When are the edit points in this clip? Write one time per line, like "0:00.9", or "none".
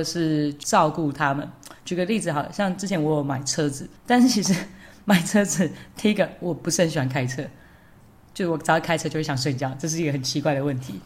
0:04.0